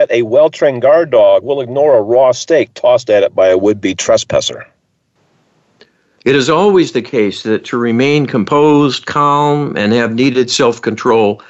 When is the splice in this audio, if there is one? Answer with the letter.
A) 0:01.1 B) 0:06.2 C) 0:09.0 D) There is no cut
B